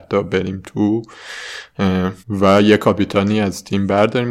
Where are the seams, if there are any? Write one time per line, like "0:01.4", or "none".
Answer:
0:02.2